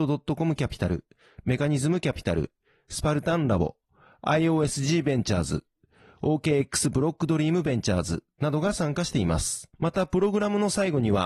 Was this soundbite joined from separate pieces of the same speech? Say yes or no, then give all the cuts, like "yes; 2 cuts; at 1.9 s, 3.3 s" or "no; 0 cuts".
yes; 1 cut; at 9.7 s